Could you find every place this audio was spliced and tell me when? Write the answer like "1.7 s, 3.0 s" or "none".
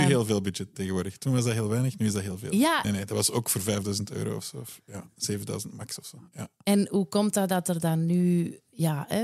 2.8 s